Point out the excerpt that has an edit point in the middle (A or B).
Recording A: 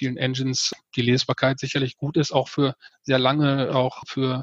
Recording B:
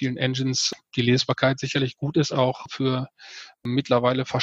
B